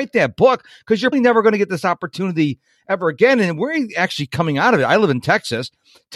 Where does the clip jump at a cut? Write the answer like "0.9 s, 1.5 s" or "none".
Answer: 1.1 s